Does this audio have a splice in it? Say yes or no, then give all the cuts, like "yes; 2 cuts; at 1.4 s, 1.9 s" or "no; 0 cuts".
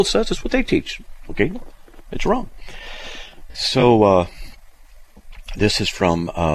no; 0 cuts